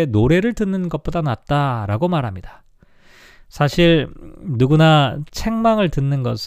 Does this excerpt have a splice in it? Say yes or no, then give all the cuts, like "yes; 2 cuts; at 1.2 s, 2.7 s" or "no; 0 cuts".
no; 0 cuts